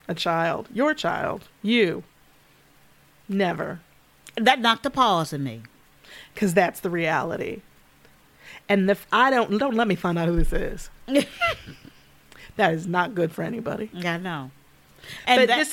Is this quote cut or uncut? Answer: uncut